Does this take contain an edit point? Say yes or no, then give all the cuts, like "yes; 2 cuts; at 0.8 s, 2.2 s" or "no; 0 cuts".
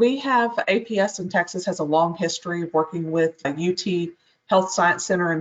no; 0 cuts